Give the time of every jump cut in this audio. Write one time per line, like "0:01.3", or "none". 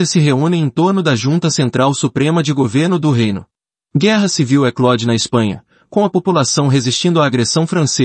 0:03.8

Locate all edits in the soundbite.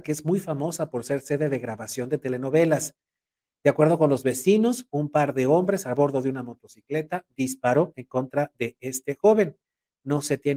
none

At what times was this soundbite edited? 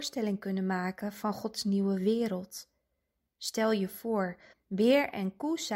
0:04.5

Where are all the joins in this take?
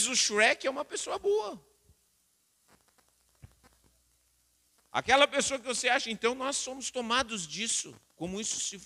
none

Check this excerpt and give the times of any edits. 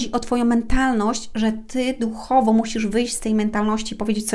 none

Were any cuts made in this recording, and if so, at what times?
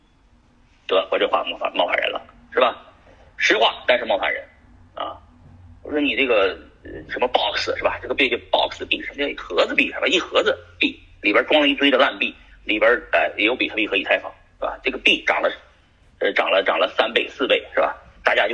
none

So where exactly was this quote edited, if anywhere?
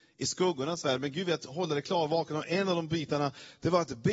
none

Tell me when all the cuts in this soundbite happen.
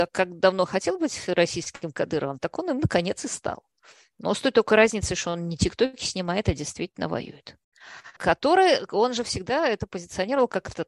0:08.2

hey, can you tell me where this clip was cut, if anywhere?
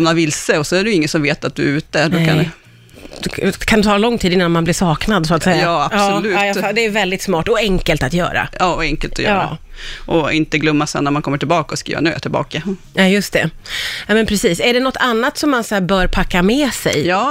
none

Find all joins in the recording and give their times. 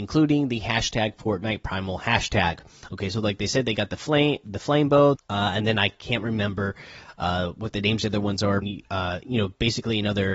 0:05.1
0:08.6

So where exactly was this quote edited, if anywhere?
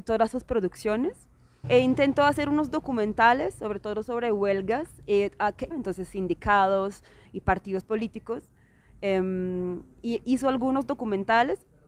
0:01.6
0:05.7

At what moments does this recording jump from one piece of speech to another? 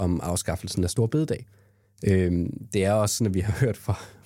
none

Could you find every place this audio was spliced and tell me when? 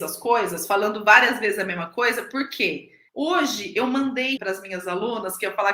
0:03.1
0:04.4

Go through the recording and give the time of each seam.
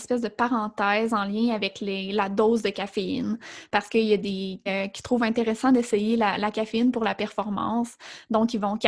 0:04.7

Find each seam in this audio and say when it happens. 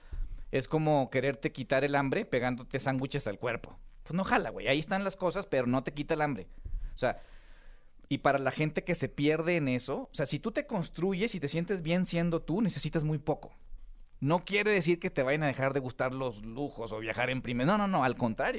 none

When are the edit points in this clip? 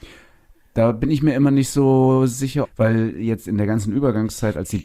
0:02.6

